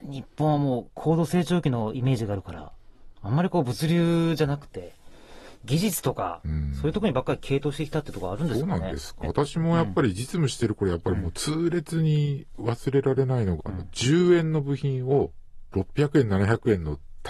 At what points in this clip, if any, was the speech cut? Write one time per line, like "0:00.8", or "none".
0:09.2
0:13.6

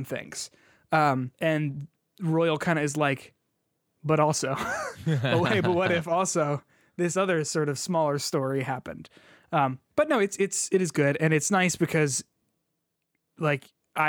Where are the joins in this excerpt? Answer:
0:01.3

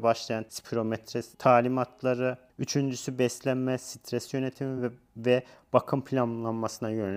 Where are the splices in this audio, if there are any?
none

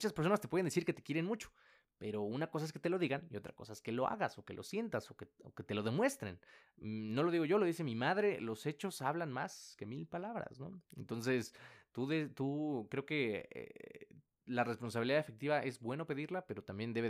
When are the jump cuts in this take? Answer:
none

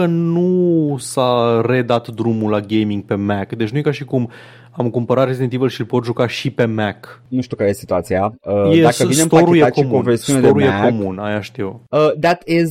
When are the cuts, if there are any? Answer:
none

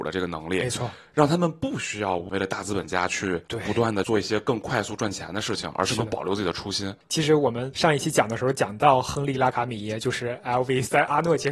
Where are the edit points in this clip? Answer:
none

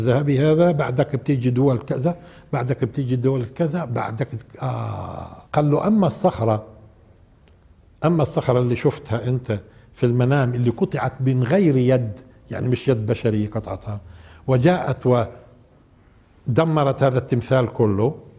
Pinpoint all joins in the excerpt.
0:05.5

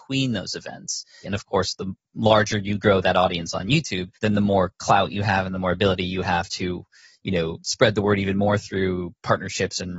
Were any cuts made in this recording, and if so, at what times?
0:01.2
0:04.1

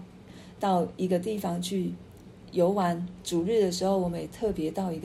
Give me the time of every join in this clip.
none

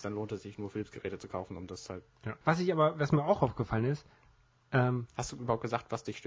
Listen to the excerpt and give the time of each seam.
0:02.4

